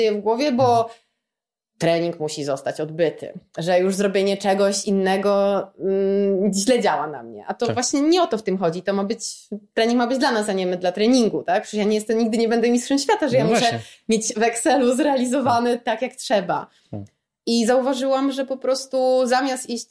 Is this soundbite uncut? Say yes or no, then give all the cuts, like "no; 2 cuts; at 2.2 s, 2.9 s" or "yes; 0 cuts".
yes; 0 cuts